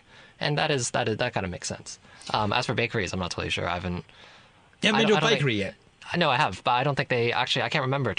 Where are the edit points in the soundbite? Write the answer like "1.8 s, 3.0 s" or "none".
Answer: none